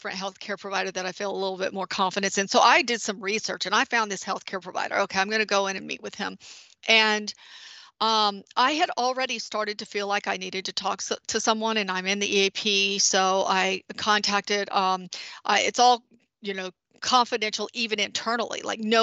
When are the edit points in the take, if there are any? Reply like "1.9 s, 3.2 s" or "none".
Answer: none

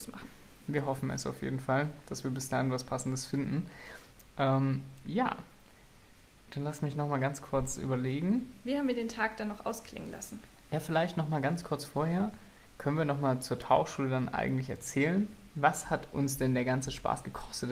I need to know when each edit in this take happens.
none

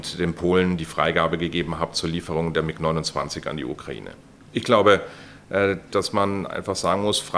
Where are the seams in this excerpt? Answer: 4.5 s, 5.9 s

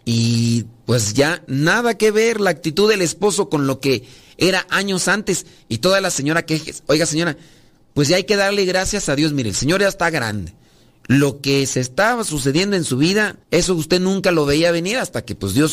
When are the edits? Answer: 13.4 s

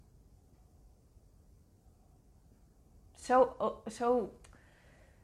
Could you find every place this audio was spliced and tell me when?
none

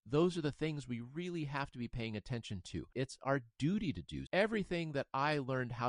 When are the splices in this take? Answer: 2.9 s, 4.3 s

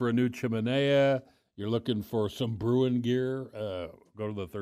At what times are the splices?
none

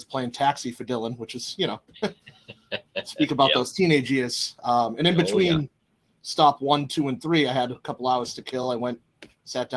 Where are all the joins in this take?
none

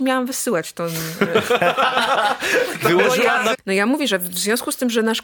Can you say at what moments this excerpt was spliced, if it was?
3.5 s

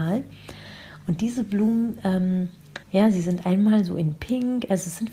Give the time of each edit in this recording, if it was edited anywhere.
2.8 s

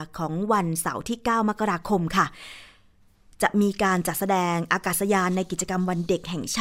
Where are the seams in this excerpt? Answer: none

